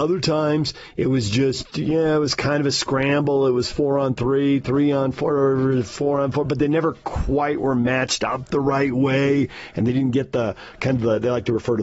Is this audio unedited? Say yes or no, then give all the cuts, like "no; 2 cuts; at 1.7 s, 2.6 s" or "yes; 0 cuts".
yes; 0 cuts